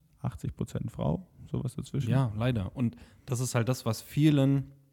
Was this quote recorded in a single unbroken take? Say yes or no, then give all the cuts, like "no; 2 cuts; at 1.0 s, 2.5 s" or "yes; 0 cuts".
yes; 0 cuts